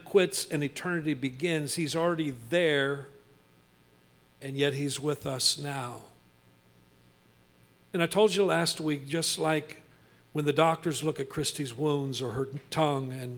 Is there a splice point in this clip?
no; 0 cuts

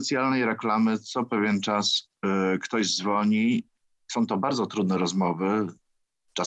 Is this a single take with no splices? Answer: yes; 0 cuts

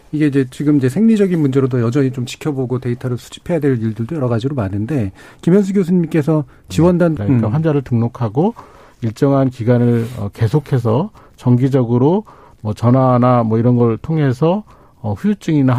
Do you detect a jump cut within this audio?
yes; 1 cut; at 7.2 s

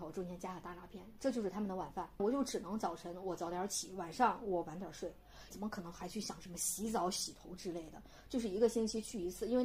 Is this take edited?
yes; 2 cuts; at 2.2 s, 5.5 s

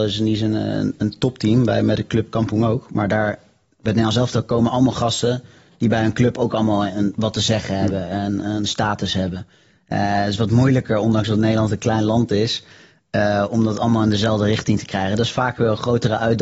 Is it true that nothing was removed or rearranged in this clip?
yes; 0 cuts

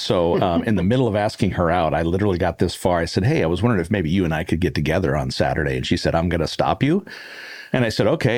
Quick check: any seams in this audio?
no; 0 cuts

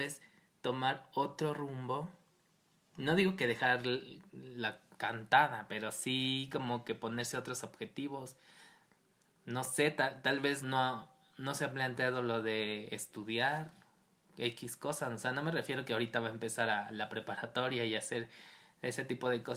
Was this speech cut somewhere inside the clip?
yes; 1 cut; at 10.6 s

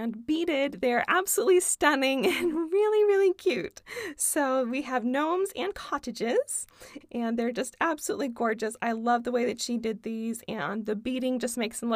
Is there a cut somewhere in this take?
yes; 1 cut; at 7.0 s

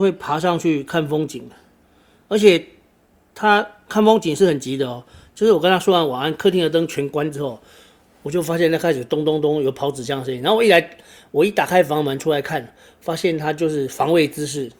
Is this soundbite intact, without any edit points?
yes; 0 cuts

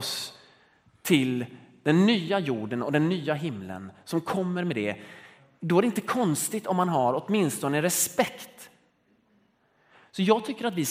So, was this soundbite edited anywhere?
no; 0 cuts

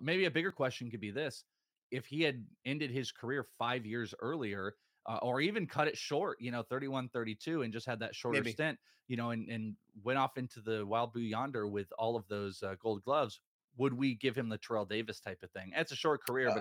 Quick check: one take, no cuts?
yes; 0 cuts

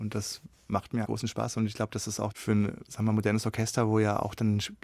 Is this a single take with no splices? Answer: no; 1 cut; at 1.0 s

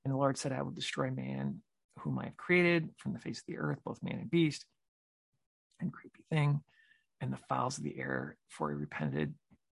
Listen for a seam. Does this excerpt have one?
no; 0 cuts

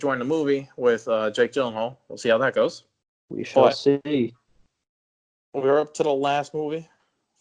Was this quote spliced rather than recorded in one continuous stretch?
no; 0 cuts

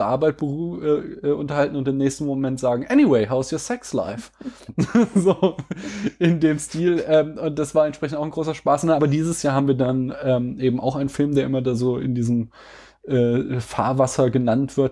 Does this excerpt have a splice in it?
no; 0 cuts

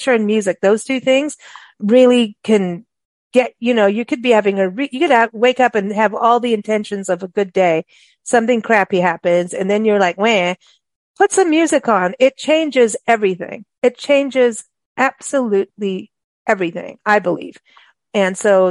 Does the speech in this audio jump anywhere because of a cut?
no; 0 cuts

